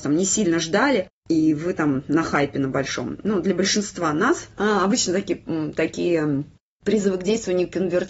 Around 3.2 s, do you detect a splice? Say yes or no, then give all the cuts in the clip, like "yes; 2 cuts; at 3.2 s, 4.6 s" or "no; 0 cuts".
no; 1 cut; at 4.5 s